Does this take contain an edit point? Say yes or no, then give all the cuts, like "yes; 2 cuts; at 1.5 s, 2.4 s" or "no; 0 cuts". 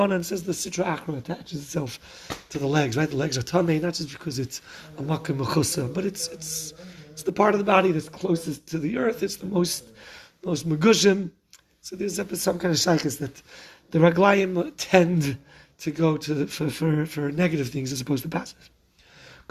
no; 0 cuts